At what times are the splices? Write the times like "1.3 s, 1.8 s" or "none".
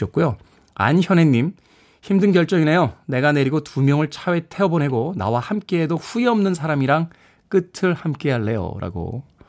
none